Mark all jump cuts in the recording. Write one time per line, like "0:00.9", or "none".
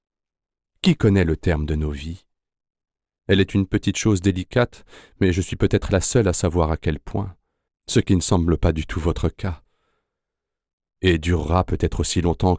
0:07.7
0:10.8